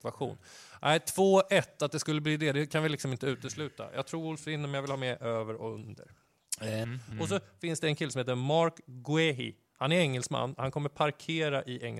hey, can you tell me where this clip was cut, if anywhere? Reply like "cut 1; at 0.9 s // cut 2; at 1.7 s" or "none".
cut 1; at 6.8 s